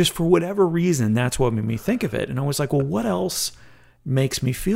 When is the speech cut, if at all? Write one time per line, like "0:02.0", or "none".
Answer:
none